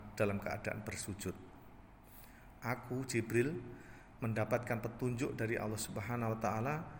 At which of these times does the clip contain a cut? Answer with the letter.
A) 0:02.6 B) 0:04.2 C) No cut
A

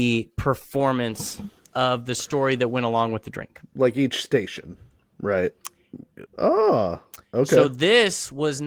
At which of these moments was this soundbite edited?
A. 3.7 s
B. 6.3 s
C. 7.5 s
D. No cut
B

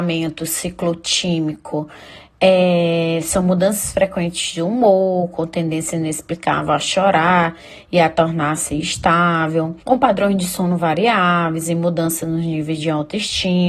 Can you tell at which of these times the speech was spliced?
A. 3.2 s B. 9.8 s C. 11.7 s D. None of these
B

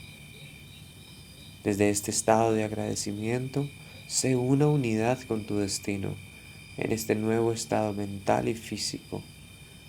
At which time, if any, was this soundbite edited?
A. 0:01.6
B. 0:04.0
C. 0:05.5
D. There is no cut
A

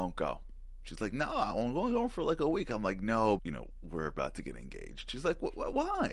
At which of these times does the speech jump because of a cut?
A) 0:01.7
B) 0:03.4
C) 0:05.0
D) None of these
B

